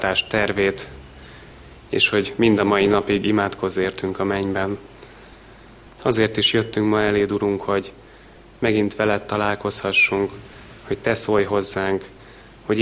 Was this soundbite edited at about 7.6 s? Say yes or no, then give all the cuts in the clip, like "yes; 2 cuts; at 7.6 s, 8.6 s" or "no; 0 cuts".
no; 1 cut; at 5.9 s